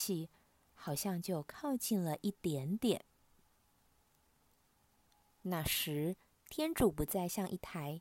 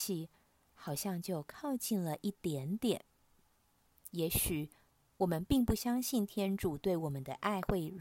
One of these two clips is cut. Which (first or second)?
second